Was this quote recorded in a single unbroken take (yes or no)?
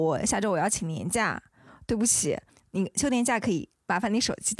yes